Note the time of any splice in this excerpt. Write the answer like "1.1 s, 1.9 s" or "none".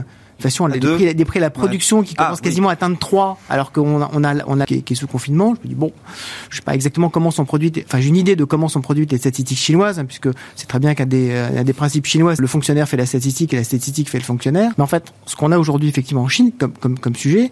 4.6 s, 12.4 s, 14.7 s